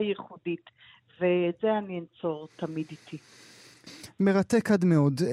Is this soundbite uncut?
yes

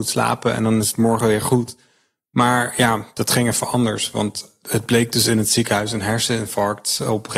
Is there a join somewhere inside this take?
no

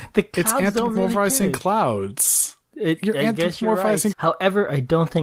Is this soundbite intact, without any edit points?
no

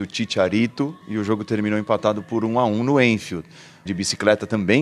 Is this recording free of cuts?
no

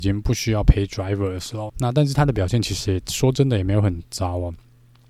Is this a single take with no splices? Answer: no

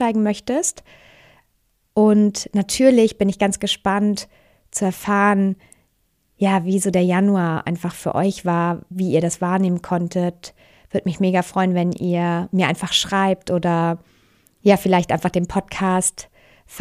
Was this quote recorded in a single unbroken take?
yes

